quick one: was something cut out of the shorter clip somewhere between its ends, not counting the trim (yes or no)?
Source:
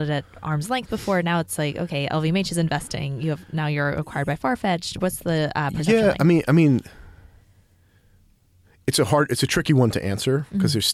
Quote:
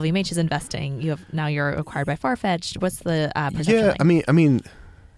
no